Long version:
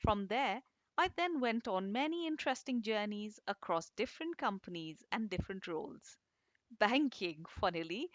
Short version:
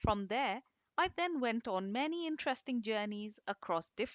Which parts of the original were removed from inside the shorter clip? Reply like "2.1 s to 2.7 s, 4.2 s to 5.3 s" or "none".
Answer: none